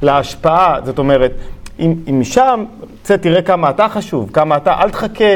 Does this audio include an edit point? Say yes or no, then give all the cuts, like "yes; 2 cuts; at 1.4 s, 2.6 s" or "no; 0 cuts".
no; 0 cuts